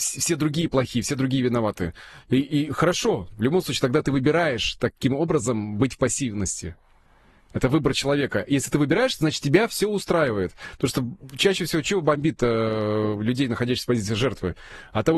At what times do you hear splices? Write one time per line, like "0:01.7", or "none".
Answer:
0:03.3